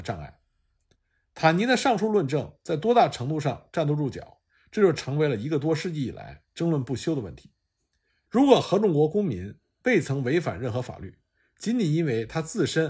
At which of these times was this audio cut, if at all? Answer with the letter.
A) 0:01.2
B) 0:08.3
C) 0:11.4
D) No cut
B